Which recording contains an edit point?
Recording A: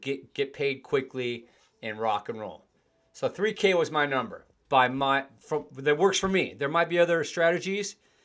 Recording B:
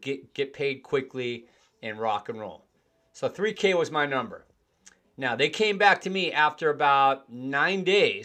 A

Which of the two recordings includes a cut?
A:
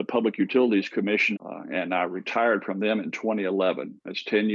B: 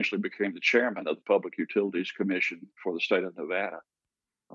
A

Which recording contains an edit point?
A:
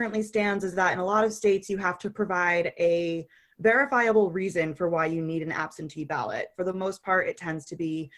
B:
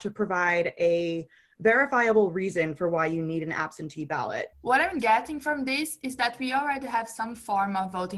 B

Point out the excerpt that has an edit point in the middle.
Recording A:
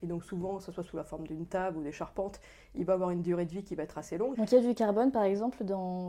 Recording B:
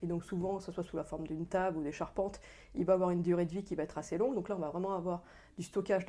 A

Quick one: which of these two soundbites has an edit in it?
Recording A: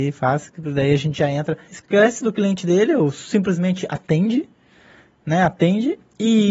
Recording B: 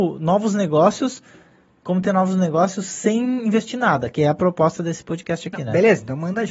A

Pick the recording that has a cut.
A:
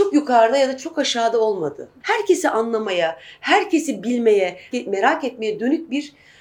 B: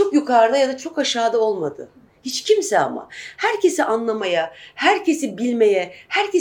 A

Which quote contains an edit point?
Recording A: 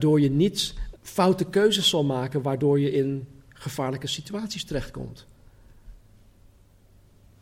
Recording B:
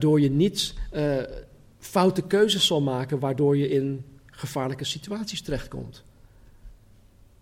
A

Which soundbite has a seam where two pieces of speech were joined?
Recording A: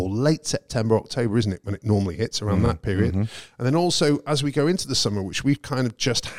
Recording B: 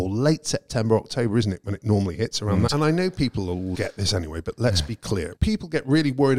B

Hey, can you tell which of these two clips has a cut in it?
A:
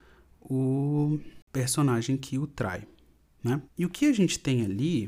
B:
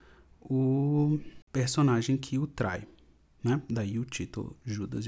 A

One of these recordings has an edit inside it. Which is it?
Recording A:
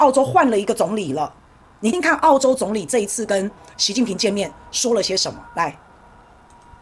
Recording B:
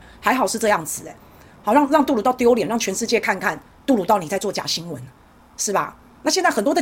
A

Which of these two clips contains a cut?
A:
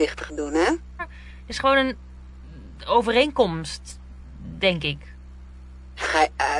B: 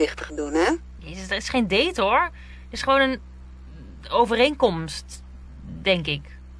A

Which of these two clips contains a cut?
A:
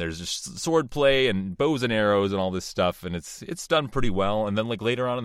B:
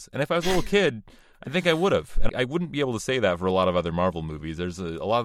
B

